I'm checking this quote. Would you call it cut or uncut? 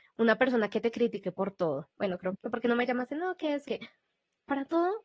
cut